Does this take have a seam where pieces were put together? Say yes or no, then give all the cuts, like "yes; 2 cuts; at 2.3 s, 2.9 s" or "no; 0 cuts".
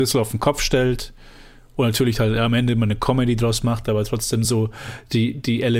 no; 0 cuts